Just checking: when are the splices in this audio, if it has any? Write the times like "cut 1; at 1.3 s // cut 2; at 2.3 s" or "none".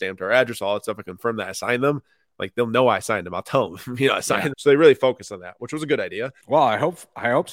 cut 1; at 4.5 s // cut 2; at 6.4 s